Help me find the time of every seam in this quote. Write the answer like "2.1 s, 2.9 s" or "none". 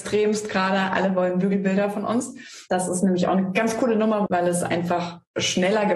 4.3 s